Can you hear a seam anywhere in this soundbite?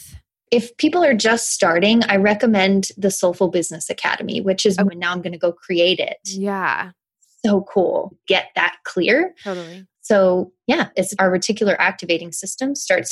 yes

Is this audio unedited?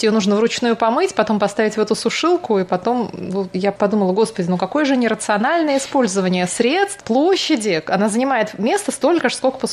no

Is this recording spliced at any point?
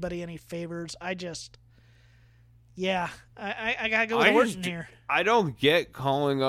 no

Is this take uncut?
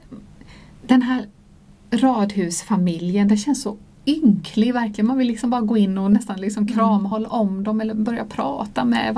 yes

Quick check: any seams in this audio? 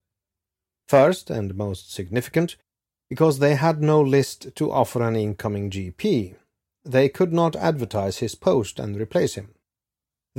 no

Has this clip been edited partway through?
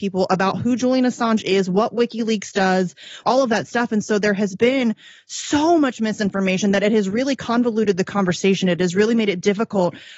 yes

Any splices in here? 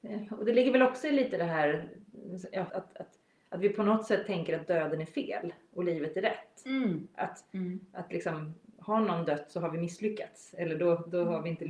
yes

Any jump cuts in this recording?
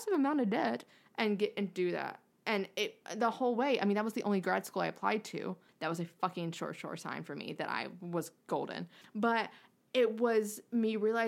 yes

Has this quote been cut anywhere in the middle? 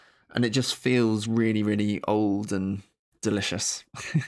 no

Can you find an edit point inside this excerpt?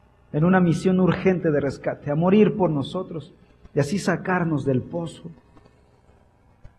no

